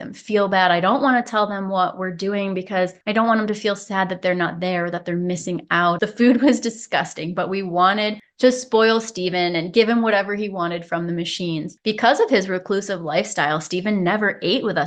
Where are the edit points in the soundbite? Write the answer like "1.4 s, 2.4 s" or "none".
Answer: 6.0 s

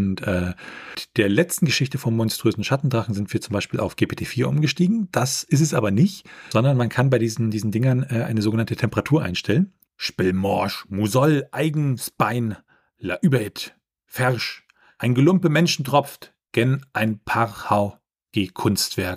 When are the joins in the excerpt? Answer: 9.9 s

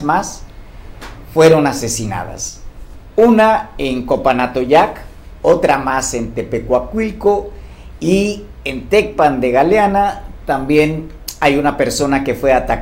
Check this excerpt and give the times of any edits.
none

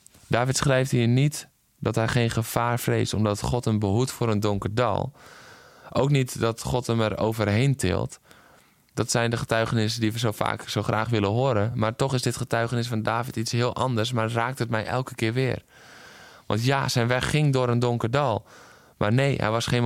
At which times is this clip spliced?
none

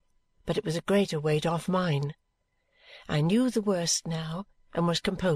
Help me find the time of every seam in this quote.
none

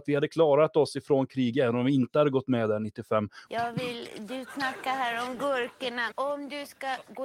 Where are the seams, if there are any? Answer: 3.5 s, 6.1 s

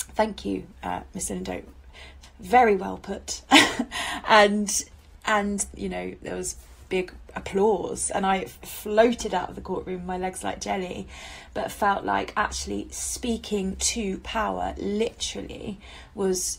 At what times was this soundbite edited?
5.7 s, 8.6 s

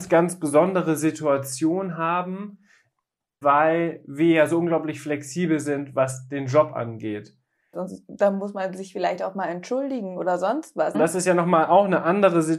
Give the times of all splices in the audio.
3.4 s, 7.7 s, 10.9 s

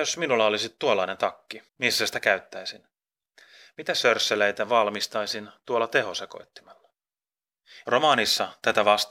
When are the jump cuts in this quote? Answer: 1.7 s, 7.9 s

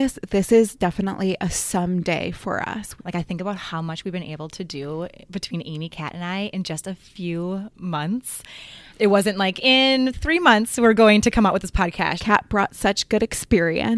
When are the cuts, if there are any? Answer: 3.0 s, 8.9 s, 12.2 s

